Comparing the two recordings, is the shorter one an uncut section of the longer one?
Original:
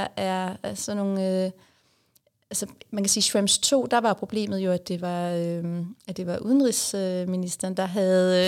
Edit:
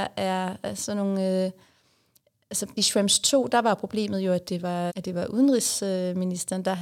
no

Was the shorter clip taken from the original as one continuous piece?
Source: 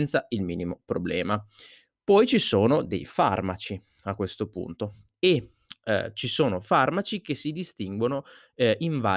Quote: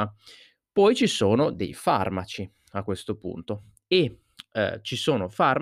yes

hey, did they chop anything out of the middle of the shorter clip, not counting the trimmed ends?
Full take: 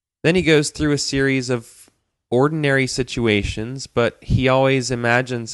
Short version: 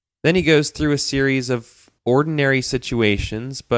yes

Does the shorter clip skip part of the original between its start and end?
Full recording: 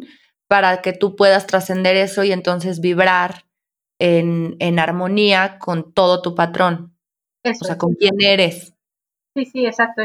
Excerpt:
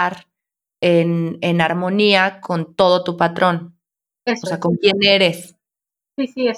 no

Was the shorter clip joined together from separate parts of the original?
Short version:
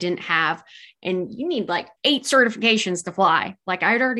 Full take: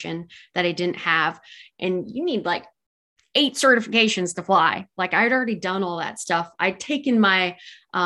yes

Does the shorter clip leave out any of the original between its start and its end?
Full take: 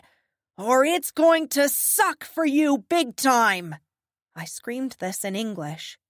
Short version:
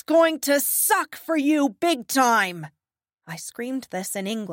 no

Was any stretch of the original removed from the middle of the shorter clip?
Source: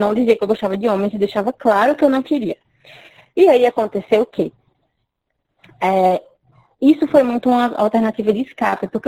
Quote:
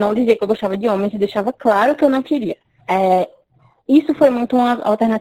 yes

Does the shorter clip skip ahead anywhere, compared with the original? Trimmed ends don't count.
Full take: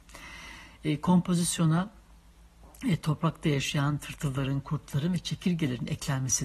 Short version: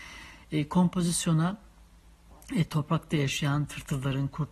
no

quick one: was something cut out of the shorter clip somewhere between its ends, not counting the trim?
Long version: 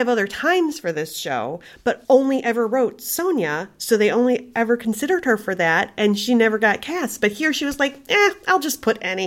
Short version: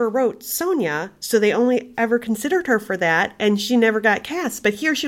no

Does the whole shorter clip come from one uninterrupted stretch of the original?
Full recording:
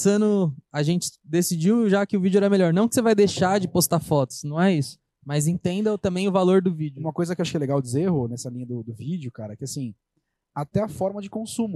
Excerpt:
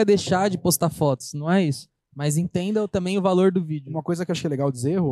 yes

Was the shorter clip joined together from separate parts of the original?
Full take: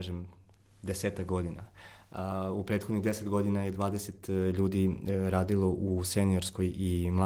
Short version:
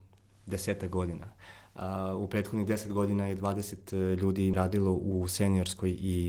yes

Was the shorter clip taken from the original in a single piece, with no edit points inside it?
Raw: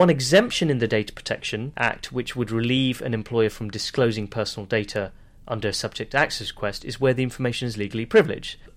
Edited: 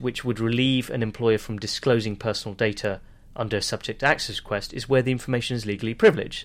yes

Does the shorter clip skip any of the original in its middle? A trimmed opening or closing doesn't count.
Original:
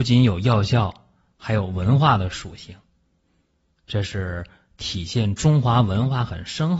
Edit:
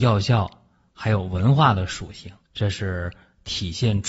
yes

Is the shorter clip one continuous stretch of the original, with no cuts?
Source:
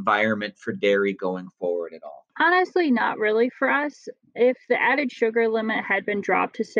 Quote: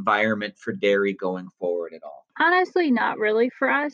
yes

